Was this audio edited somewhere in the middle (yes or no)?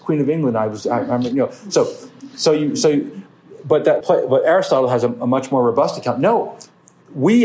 yes